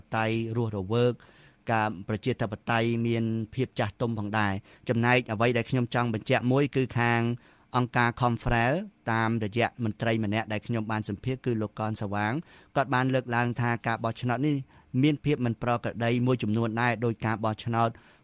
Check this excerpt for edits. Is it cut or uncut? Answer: uncut